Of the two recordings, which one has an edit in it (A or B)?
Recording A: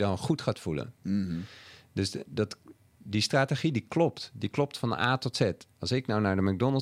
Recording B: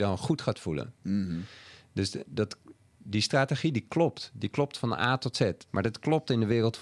B